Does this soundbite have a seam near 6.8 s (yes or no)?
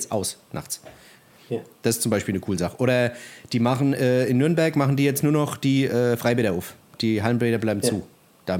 no